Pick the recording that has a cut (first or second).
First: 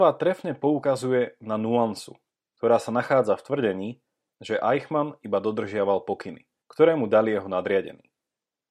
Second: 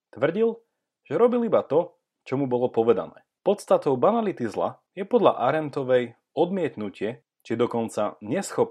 second